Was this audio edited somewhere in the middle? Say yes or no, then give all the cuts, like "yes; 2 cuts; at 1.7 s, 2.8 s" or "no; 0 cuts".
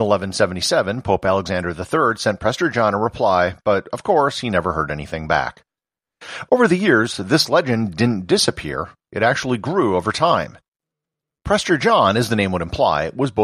no; 0 cuts